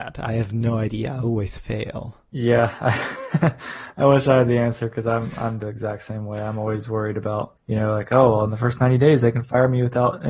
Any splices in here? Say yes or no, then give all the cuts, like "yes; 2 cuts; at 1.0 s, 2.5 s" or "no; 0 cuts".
no; 0 cuts